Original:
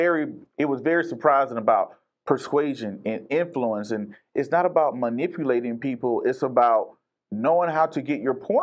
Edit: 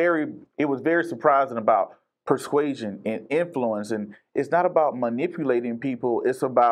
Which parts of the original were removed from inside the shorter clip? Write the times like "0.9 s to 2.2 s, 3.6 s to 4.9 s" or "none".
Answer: none

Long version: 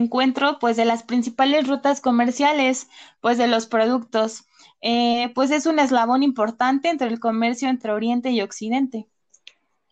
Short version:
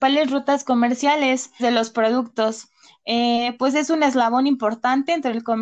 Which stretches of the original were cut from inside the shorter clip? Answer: 3.0 s to 3.4 s

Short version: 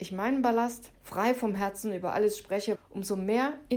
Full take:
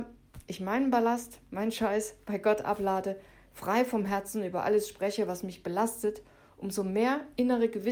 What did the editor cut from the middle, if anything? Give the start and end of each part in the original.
1.4 s to 3.4 s, 5.3 s to 6.4 s

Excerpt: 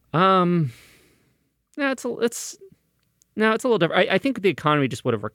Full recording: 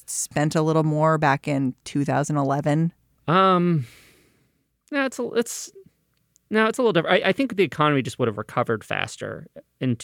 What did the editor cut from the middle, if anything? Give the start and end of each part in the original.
none

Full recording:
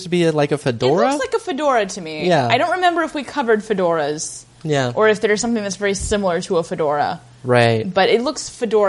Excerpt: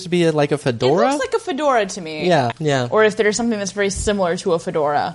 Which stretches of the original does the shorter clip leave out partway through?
2.5 s to 4.5 s

